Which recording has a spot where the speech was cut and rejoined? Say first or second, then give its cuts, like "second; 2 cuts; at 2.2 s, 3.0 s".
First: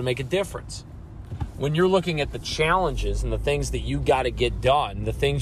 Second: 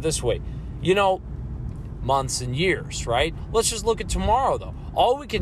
second; 1 cut; at 2.0 s